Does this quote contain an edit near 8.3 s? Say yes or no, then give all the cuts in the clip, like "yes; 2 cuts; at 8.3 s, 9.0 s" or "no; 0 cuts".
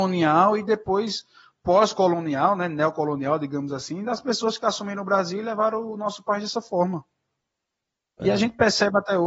no; 0 cuts